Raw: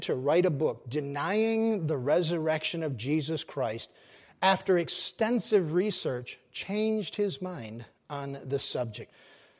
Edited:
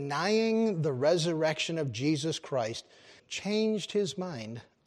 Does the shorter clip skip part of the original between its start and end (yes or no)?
yes